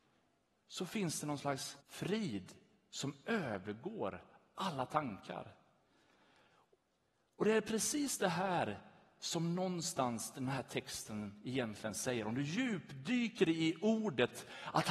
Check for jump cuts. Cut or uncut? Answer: cut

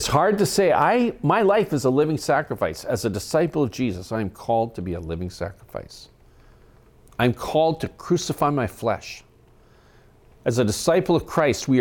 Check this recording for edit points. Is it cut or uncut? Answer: uncut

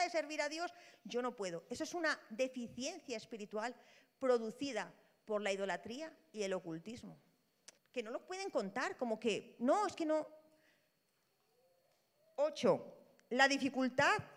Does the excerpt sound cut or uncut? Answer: cut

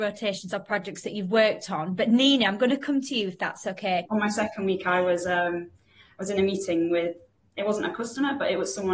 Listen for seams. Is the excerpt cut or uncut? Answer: cut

